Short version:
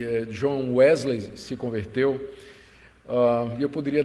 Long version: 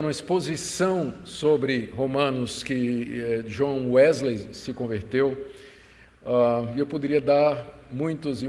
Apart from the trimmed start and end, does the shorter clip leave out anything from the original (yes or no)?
no